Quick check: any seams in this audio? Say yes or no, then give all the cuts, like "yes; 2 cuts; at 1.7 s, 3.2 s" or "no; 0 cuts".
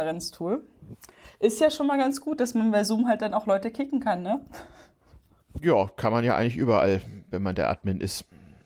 no; 0 cuts